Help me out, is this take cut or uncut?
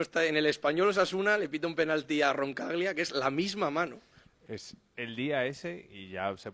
uncut